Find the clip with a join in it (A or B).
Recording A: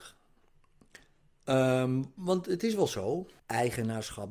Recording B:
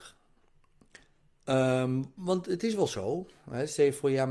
A